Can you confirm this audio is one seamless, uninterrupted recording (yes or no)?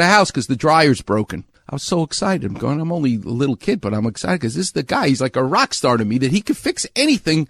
yes